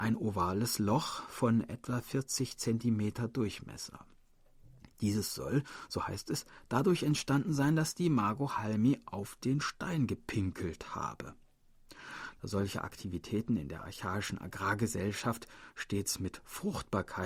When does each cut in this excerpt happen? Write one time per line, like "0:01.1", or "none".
none